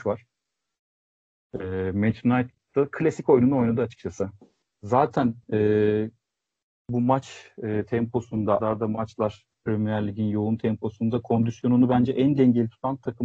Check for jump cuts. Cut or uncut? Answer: cut